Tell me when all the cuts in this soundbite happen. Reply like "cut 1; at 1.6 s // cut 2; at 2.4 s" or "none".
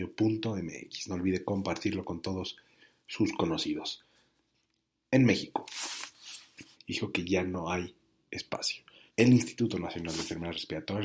cut 1; at 6.7 s // cut 2; at 9.1 s